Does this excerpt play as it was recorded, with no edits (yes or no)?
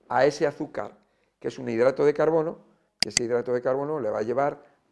yes